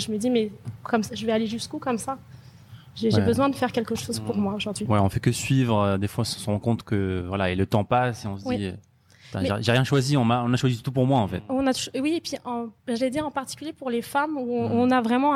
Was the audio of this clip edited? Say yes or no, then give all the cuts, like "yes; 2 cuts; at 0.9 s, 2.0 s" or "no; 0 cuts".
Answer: yes; 1 cut; at 12.8 s